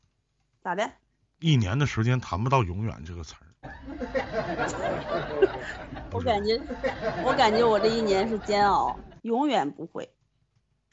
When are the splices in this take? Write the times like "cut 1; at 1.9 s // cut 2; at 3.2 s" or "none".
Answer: cut 1; at 6.1 s // cut 2; at 9.2 s